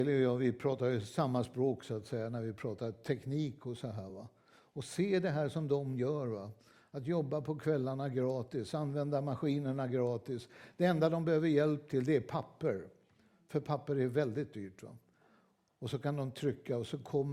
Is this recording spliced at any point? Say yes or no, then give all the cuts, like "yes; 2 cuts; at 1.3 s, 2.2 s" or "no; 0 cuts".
no; 0 cuts